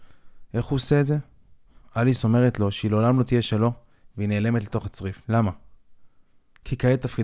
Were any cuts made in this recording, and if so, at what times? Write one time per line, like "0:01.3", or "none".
0:01.8
0:05.2